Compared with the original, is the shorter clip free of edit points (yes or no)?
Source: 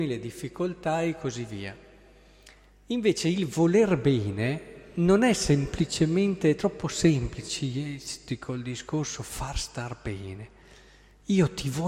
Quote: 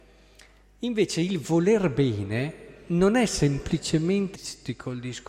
no